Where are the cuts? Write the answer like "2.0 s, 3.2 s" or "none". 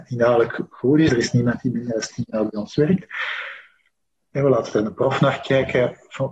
1.1 s, 4.2 s